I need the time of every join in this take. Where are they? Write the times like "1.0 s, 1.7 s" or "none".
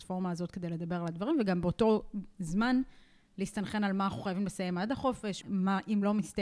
5.4 s